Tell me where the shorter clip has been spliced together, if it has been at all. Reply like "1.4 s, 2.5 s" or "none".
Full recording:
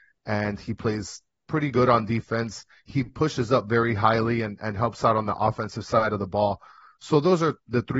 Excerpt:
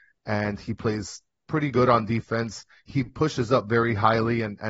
none